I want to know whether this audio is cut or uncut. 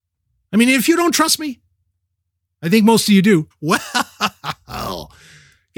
cut